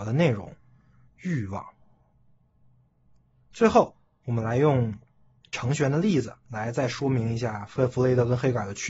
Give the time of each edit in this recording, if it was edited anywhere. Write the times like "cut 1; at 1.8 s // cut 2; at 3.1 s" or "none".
none